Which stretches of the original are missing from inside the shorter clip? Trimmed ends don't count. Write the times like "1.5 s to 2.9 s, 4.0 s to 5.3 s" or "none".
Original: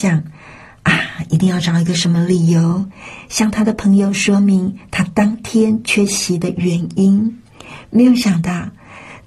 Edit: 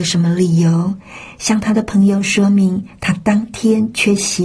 none